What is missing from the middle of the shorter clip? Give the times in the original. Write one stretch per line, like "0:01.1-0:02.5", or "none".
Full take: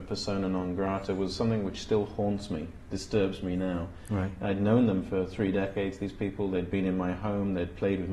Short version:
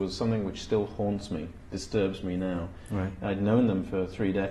none